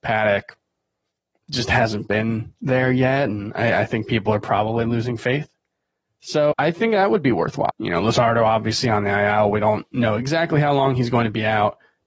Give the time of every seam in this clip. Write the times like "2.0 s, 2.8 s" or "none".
6.5 s, 7.7 s